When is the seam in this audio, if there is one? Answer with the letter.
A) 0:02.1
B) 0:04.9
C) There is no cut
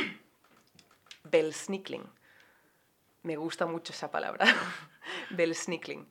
C